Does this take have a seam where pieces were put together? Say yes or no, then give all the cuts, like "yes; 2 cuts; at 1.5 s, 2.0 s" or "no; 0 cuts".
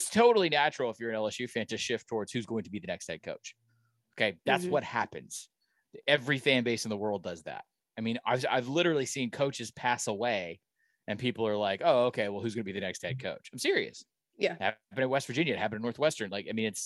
no; 0 cuts